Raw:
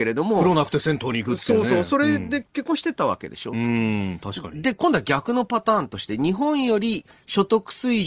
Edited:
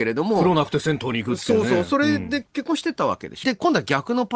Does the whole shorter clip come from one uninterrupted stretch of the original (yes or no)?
no